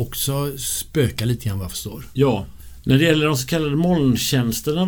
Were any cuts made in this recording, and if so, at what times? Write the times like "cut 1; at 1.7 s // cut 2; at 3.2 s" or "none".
none